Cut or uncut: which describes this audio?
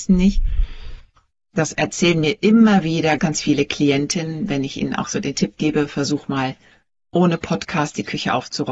cut